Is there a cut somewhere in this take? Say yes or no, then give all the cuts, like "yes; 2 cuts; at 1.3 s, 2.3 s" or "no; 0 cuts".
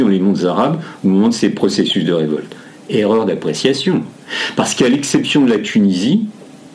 no; 0 cuts